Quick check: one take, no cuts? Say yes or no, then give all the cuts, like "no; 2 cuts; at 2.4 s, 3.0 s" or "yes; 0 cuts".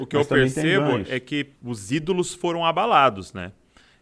no; 1 cut; at 1.6 s